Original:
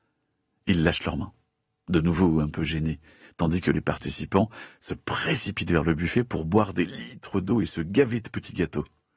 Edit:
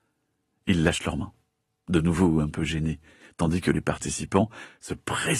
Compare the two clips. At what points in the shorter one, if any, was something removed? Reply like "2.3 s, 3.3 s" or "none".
none